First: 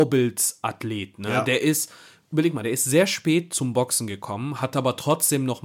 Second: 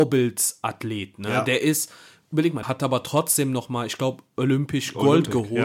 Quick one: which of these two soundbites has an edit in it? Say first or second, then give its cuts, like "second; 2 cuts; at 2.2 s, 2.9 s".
second; 1 cut; at 2.6 s